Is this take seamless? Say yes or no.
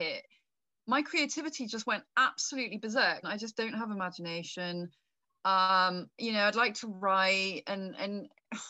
no